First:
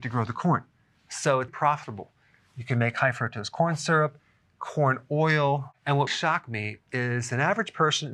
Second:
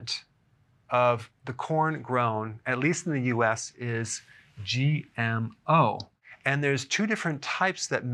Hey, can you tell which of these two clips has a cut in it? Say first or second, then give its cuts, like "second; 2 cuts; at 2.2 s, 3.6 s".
first; 2 cuts; at 1.5 s, 6.1 s